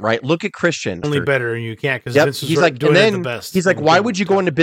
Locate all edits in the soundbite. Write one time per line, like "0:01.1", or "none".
0:01.0